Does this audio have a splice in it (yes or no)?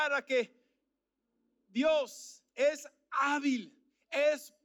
yes